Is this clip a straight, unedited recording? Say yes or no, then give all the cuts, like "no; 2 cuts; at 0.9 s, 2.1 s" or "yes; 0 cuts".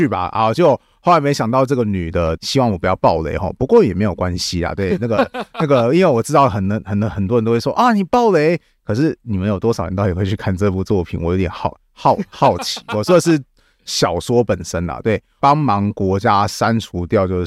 no; 2 cuts; at 2.4 s, 15.4 s